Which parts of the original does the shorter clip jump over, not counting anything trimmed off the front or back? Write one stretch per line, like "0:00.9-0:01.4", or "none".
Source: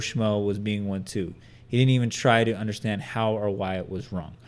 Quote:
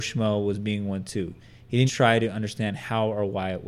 0:01.9-0:02.1